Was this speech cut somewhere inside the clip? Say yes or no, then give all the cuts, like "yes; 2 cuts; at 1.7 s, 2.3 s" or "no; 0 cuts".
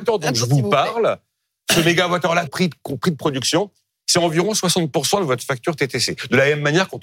yes; 1 cut; at 2.5 s